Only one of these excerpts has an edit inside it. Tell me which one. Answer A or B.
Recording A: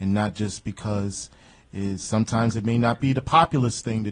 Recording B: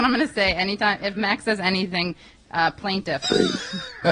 B